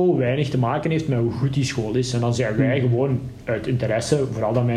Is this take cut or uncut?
uncut